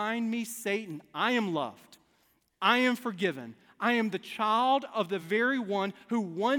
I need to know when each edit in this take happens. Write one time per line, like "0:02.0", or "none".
none